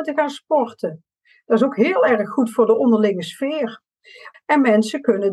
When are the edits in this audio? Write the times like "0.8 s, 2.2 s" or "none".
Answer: 4.3 s